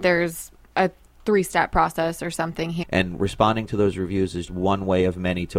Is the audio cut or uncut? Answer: cut